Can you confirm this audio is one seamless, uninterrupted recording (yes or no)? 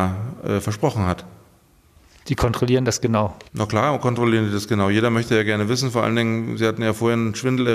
no